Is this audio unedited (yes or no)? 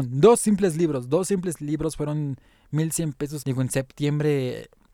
no